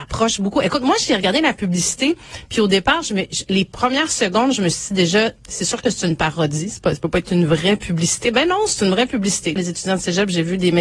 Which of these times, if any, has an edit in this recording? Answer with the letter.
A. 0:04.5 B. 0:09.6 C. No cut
B